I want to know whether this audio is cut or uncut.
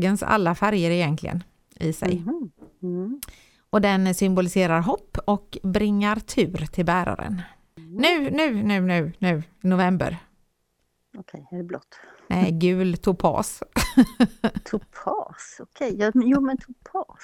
uncut